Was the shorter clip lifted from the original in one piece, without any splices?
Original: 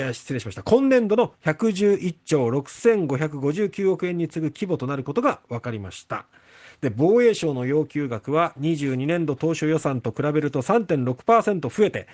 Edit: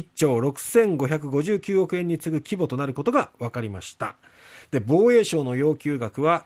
yes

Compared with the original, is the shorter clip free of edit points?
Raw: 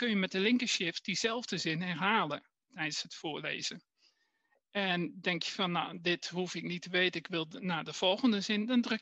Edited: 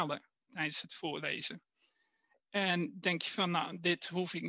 yes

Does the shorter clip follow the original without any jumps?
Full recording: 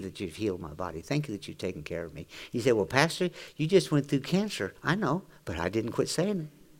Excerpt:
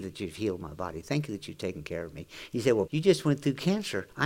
no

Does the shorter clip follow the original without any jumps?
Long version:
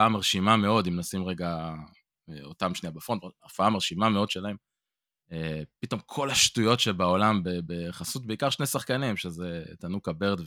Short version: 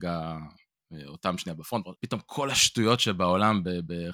no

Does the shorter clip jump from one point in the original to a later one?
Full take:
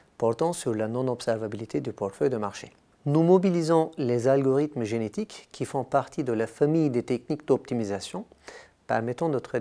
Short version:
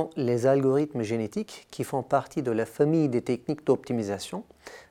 no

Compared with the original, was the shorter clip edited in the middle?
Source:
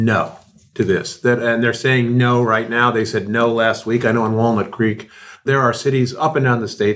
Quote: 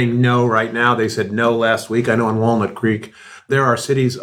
no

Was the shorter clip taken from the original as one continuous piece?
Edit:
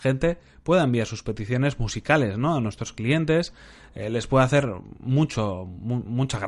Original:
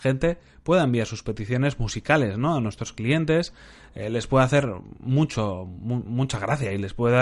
yes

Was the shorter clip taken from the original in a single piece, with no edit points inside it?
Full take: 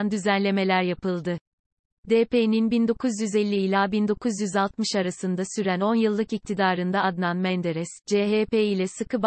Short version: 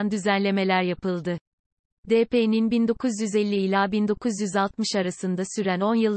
yes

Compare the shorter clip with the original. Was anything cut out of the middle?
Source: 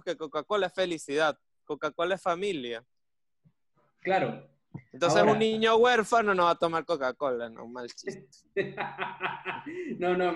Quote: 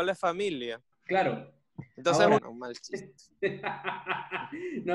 yes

